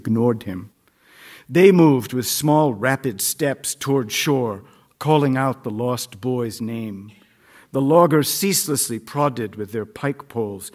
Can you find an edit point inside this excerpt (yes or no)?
no